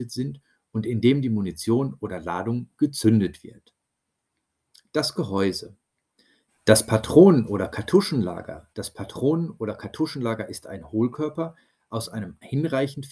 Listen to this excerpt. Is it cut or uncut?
cut